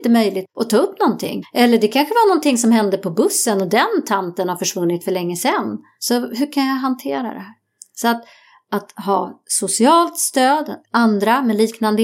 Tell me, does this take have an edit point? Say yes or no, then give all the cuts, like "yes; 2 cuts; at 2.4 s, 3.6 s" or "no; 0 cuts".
no; 0 cuts